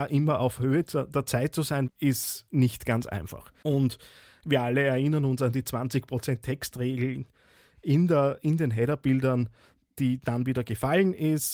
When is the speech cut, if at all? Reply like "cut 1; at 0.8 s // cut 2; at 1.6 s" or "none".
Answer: cut 1; at 1.9 s // cut 2; at 3.6 s